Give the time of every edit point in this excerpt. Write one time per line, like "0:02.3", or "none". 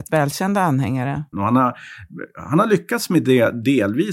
0:01.3